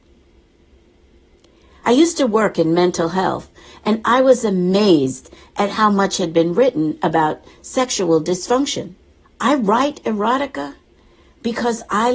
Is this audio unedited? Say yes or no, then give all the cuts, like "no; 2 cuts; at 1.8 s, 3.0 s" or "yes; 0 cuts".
no; 2 cuts; at 1.8 s, 9.2 s